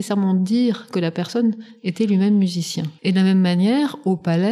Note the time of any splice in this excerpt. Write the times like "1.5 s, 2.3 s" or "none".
3.0 s